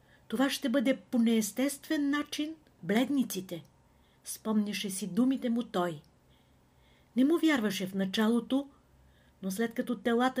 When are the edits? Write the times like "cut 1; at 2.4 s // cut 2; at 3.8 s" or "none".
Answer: cut 1; at 2.8 s